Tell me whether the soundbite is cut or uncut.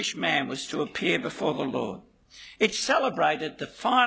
uncut